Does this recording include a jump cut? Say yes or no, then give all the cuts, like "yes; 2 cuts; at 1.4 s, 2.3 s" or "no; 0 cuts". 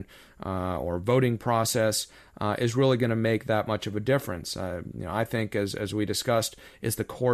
no; 0 cuts